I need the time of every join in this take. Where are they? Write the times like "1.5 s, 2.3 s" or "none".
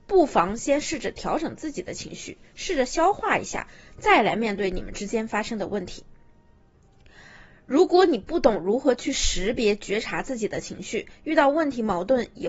none